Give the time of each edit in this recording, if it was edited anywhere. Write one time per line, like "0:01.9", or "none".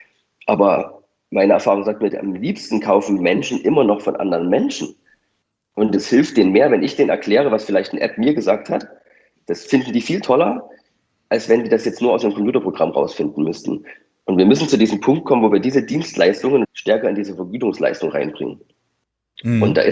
0:16.6